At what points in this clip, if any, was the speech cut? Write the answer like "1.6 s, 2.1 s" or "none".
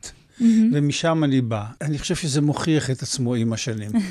1.8 s